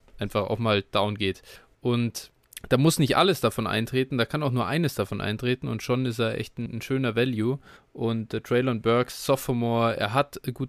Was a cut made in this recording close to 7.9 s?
no; 1 cut; at 1.7 s

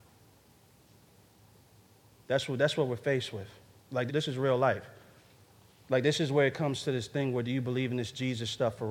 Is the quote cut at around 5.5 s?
no; 1 cut; at 4.1 s

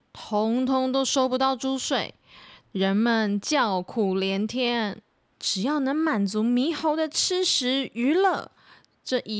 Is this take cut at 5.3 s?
yes; 1 cut; at 5.3 s

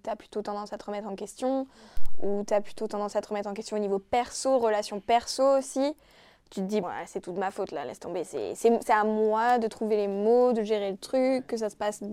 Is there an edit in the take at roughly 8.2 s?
no; 1 cut; at 6.8 s

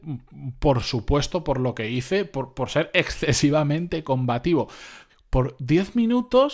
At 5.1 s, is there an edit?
yes; 1 cut; at 5.1 s

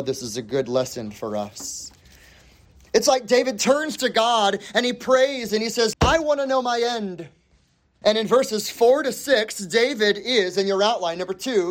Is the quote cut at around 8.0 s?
yes; 2 cuts; at 5.9 s, 8.0 s

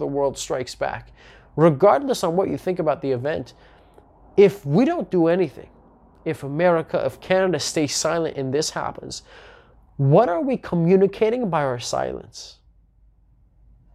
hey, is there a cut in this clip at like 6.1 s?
no; 0 cuts

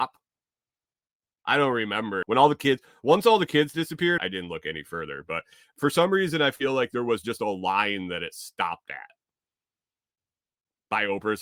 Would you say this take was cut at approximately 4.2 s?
yes; 2 cuts; at 2.2 s, 4.2 s

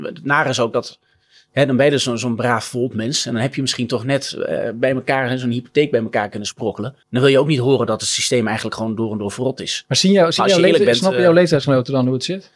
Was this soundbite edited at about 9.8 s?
no; 1 cut; at 7.0 s

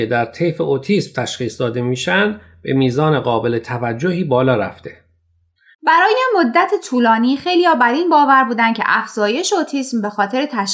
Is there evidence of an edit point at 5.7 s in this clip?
yes; 1 cut; at 5.7 s

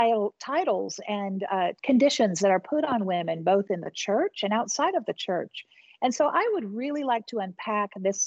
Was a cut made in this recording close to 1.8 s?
yes; 1 cut; at 1.8 s

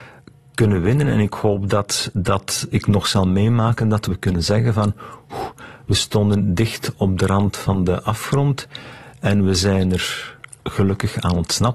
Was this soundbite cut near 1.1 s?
no; 0 cuts

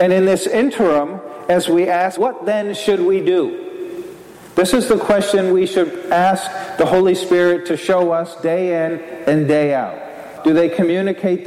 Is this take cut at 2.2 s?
yes; 2 cuts; at 2.2 s, 10.4 s

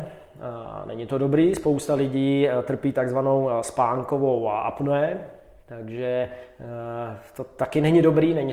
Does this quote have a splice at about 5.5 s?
no; 0 cuts

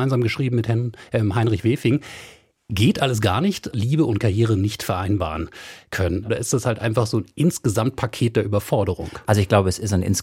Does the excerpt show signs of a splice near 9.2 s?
no; 2 cuts; at 3.7 s, 6.3 s

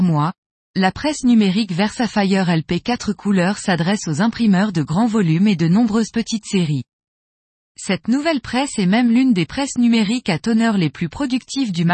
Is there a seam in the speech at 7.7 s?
no; 0 cuts

